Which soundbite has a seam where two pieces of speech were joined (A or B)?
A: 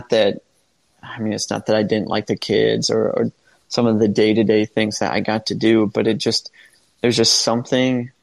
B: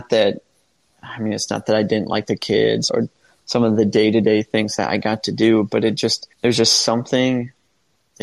B